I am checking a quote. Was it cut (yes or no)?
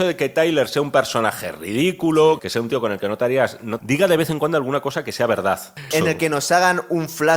yes